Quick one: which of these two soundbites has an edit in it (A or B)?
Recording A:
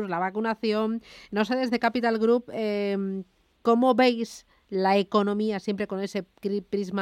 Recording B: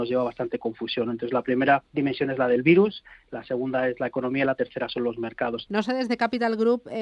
B